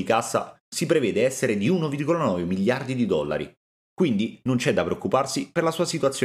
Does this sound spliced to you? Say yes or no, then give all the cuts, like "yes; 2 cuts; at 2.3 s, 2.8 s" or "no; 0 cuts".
yes; 1 cut; at 3.7 s